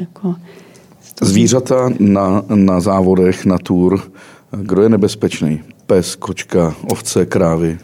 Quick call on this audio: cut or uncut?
uncut